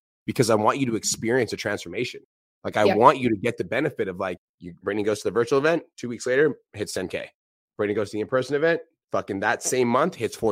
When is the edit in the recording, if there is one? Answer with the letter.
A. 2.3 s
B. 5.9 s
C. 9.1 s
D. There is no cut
D